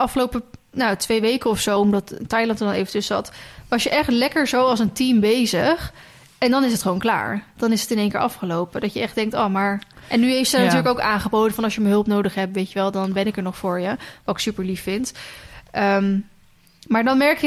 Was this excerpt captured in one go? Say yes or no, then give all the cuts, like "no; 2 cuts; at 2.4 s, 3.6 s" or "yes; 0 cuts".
yes; 0 cuts